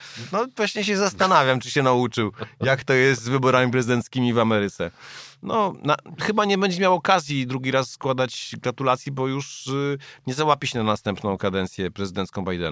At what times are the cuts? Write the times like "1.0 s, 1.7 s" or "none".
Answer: none